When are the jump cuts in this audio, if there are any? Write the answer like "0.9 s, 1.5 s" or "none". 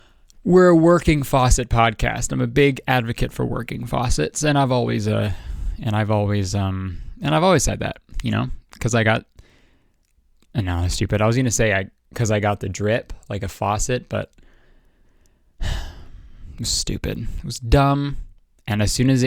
none